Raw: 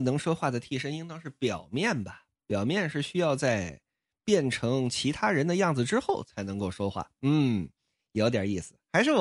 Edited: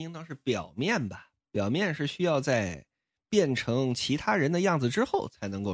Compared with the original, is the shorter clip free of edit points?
yes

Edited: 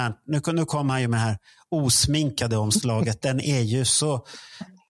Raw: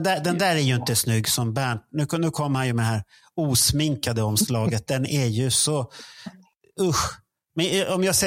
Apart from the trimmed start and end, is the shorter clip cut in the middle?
no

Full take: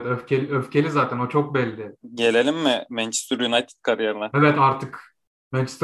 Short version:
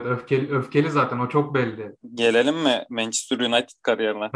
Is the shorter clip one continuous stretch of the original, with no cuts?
yes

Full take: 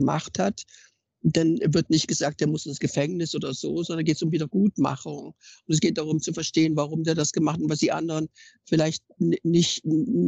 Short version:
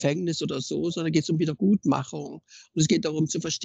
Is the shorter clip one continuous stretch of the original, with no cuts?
yes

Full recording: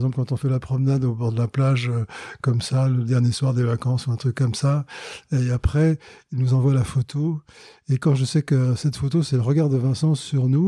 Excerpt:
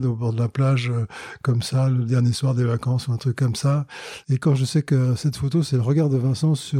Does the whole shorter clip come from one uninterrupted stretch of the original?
no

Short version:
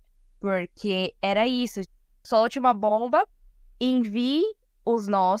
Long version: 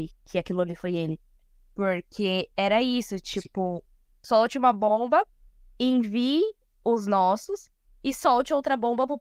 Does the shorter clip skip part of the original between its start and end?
yes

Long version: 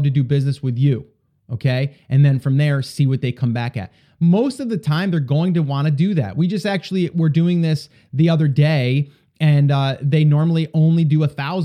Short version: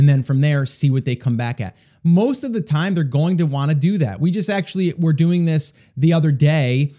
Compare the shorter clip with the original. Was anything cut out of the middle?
no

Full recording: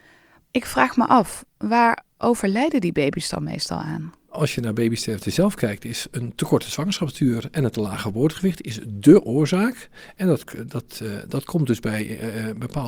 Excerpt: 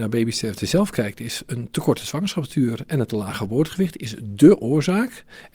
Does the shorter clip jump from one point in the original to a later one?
no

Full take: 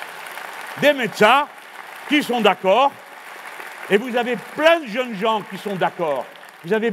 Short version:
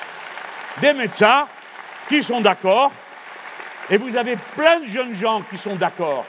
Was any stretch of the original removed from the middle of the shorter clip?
no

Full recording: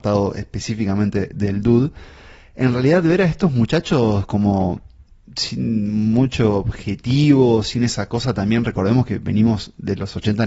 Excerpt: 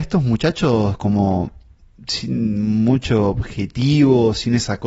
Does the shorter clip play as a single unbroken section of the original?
yes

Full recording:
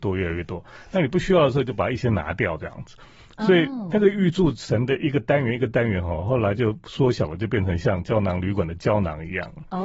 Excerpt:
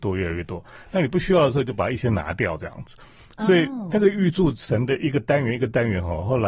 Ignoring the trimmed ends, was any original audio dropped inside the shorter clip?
no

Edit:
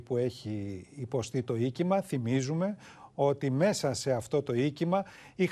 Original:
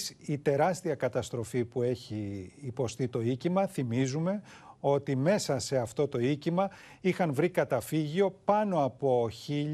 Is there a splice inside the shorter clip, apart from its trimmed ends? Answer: no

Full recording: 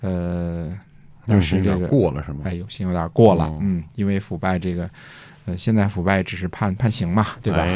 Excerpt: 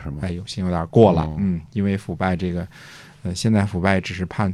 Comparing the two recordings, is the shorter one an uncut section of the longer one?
yes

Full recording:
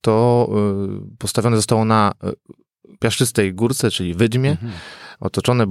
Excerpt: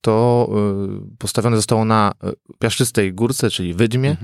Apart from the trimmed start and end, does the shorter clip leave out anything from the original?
yes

